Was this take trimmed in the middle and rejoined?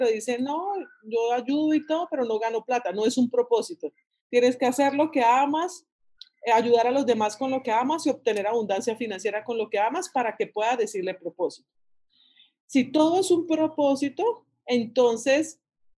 no; 0 cuts

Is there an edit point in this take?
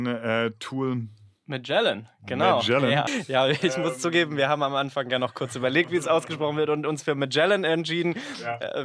yes; 1 cut; at 3.1 s

